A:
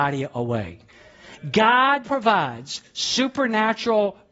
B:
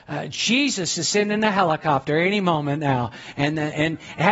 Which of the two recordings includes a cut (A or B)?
A